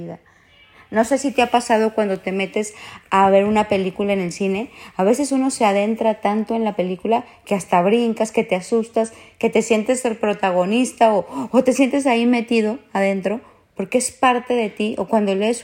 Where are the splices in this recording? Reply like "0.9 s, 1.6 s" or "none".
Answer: none